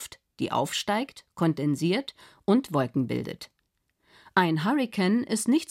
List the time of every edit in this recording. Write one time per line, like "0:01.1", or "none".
none